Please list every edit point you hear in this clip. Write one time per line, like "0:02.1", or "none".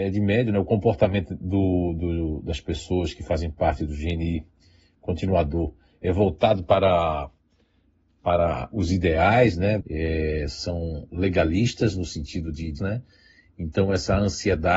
0:09.8
0:12.8